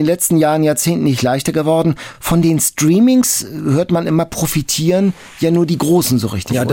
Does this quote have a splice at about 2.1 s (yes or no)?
no